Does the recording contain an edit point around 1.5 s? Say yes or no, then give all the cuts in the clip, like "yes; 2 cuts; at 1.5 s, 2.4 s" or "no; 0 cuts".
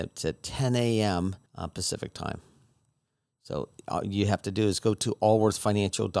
yes; 1 cut; at 1.5 s